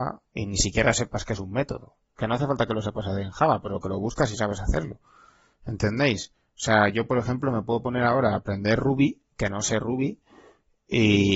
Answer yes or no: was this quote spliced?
no